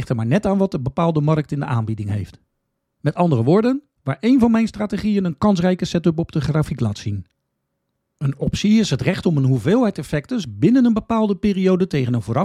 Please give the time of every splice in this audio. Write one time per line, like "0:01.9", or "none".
0:08.0
0:10.4